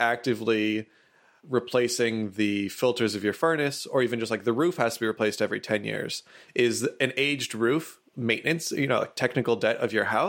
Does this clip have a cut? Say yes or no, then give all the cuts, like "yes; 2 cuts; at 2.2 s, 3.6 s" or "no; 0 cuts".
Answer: no; 0 cuts